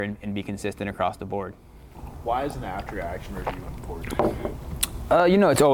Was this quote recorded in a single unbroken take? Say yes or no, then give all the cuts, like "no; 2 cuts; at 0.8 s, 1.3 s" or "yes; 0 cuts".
yes; 0 cuts